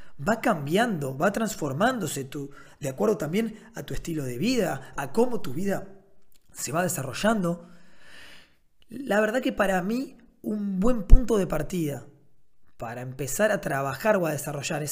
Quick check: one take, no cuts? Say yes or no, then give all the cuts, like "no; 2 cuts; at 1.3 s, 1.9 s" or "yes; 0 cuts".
no; 1 cut; at 5.0 s